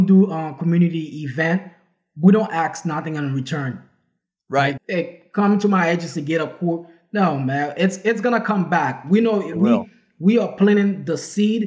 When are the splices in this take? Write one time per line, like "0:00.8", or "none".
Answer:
0:04.8